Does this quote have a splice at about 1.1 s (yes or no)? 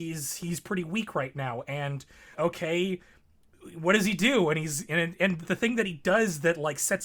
no